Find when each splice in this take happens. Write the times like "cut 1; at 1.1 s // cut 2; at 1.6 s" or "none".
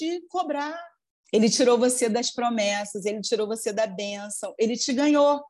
cut 1; at 1.2 s